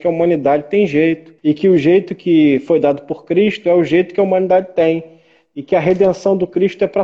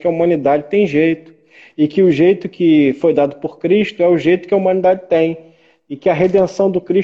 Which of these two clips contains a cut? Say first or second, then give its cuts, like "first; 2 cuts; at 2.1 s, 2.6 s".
first; 1 cut; at 1.4 s